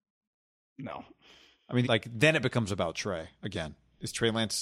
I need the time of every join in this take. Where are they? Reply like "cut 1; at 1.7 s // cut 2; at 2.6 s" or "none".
cut 1; at 1.8 s

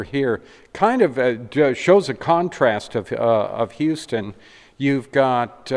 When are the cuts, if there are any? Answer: none

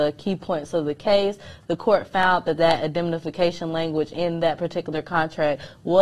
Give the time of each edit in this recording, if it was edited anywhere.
none

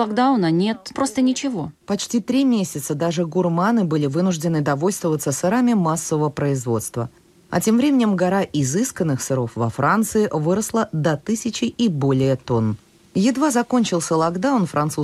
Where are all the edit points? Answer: cut 1; at 0.9 s

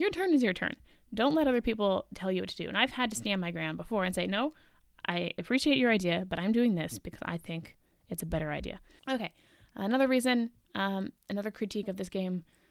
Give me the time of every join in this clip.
cut 1; at 9.0 s

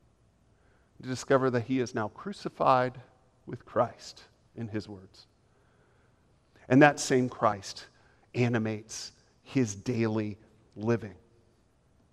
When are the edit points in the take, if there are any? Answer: none

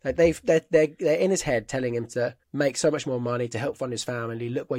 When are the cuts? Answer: cut 1; at 2.4 s

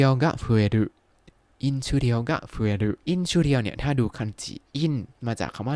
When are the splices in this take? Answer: cut 1; at 3.0 s

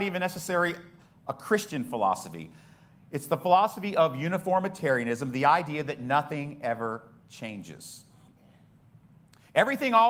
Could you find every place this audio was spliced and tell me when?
none

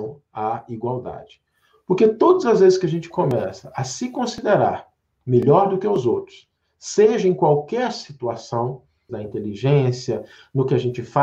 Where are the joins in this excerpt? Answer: cut 1; at 9.1 s

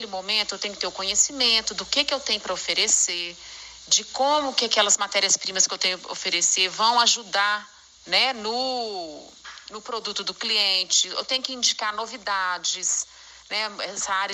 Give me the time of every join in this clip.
none

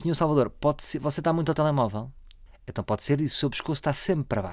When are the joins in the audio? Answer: cut 1; at 2.5 s

